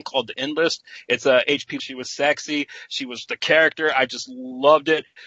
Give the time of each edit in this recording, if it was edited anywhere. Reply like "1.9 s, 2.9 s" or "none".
1.8 s